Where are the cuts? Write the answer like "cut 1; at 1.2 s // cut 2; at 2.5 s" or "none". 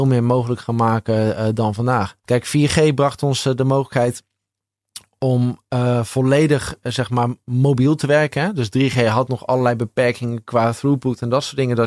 cut 1; at 2.2 s